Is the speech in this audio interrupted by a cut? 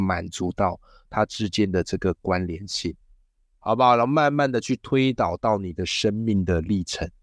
no; 0 cuts

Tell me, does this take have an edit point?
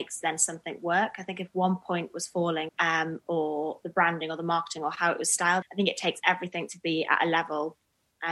yes; 2 cuts; at 2.7 s, 5.6 s

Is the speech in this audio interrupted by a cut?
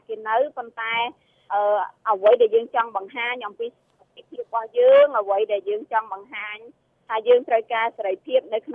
no; 0 cuts

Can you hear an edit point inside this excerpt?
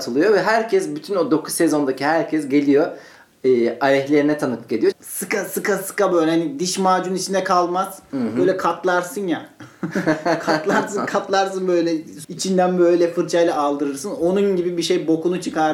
yes; 2 cuts; at 4.9 s, 12.2 s

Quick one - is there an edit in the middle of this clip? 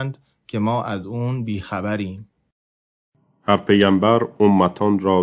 no; 0 cuts

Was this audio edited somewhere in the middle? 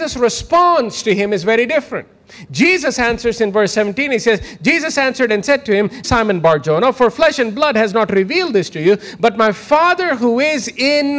yes; 1 cut; at 6.0 s

